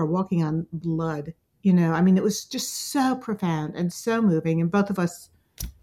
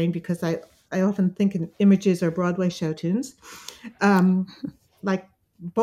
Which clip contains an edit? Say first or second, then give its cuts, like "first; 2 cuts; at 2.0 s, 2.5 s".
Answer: second; 1 cut; at 4.9 s